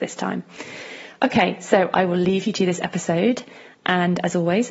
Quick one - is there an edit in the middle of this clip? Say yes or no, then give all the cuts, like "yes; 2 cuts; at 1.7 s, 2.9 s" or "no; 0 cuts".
no; 0 cuts